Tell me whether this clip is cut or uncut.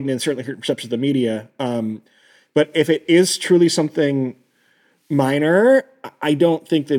uncut